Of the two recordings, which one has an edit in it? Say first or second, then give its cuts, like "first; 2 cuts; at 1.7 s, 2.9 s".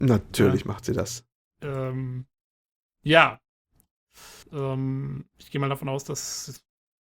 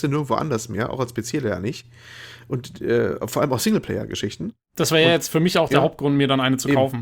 first; 1 cut; at 4.4 s